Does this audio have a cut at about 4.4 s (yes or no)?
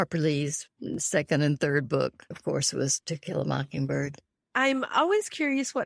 yes